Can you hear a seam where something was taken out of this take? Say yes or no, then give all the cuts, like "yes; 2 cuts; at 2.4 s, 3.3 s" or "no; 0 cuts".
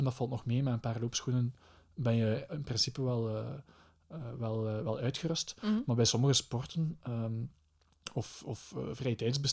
no; 0 cuts